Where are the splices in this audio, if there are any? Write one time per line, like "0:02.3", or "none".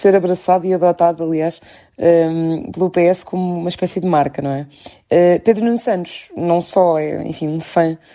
none